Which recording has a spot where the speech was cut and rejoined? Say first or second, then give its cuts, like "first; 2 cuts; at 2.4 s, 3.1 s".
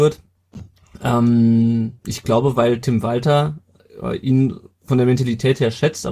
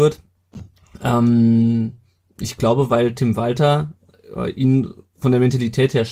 first; 1 cut; at 2.0 s